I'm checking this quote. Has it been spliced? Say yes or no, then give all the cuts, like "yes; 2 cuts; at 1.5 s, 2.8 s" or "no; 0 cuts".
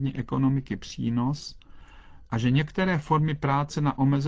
yes; 1 cut; at 2.3 s